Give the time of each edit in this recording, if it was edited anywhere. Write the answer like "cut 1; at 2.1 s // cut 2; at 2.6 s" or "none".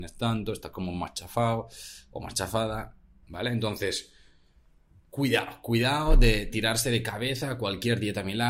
cut 1; at 3.2 s